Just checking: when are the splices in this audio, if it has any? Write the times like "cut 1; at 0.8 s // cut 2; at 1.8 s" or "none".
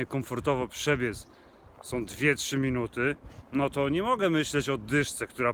none